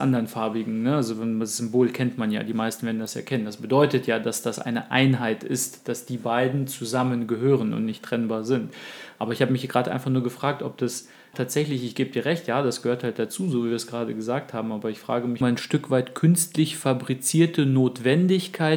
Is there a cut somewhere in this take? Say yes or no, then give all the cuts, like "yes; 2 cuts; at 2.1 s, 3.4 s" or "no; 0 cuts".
yes; 2 cuts; at 11.3 s, 15.4 s